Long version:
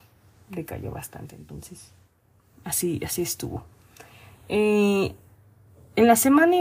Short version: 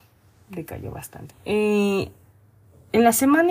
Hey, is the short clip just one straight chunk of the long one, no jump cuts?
no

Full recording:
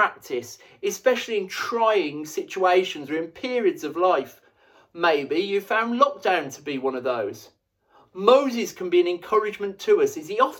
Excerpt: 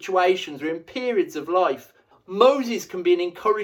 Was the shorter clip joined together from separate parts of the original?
yes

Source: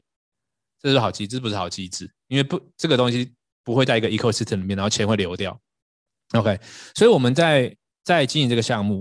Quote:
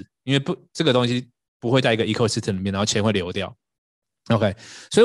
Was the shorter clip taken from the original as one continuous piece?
yes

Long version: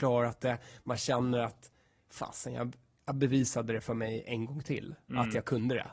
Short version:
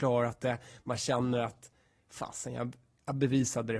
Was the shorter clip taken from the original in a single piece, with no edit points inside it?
yes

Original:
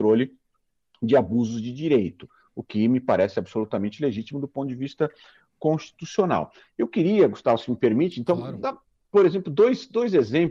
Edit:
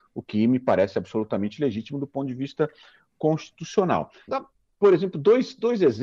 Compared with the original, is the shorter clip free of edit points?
no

